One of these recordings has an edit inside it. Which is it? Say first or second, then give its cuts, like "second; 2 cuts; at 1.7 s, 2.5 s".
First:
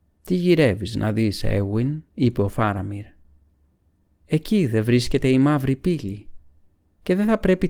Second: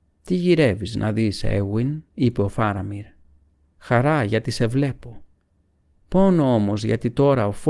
second; 1 cut; at 3.7 s